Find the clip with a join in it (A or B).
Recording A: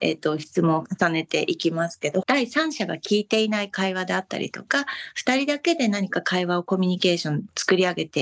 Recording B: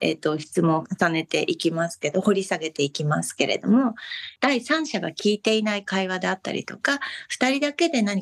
A